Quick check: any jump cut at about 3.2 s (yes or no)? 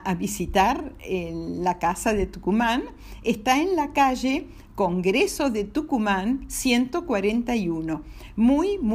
no